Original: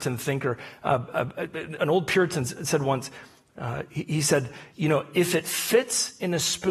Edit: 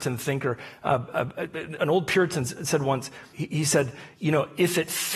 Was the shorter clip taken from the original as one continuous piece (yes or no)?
no